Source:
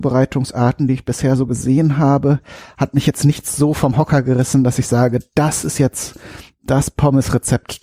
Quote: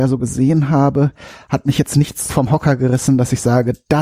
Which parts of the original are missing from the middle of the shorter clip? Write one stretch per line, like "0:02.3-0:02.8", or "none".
0:03.6-0:03.7